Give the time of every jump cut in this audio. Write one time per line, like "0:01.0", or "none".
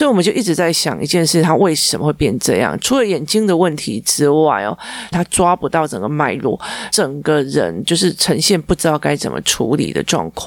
0:05.1
0:06.9

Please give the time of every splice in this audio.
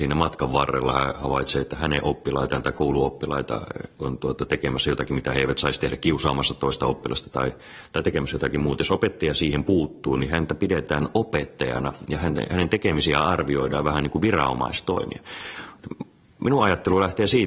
0:03.9

